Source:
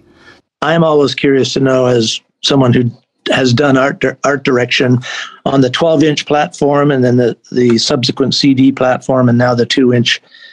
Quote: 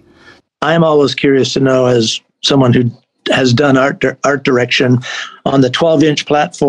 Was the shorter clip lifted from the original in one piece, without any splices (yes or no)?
yes